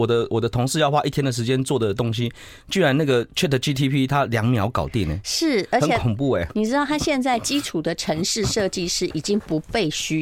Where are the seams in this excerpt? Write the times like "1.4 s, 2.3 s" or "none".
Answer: none